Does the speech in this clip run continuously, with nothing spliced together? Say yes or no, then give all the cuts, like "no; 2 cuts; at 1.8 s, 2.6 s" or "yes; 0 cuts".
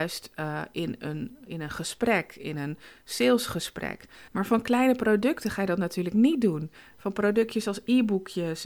no; 2 cuts; at 1.4 s, 4.3 s